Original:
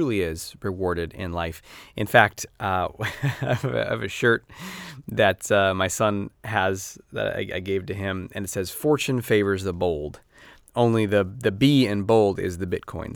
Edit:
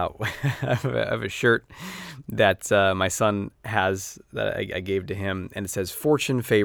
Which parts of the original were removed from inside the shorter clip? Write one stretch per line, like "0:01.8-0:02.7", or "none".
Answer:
none